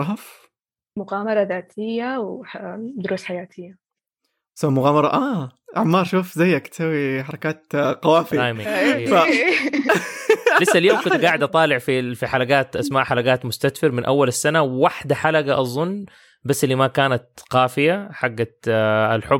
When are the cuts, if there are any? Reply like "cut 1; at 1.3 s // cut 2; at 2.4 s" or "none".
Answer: none